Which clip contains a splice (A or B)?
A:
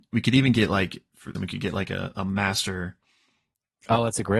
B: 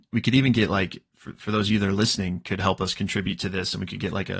A